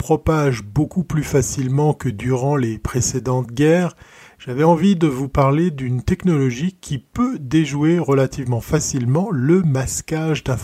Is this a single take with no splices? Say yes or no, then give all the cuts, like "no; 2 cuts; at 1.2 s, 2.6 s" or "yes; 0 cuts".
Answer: yes; 0 cuts